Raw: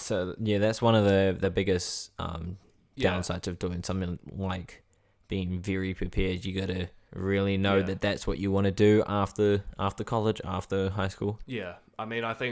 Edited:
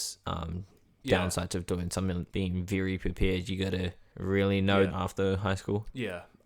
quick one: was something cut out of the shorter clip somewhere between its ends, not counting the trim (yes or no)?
yes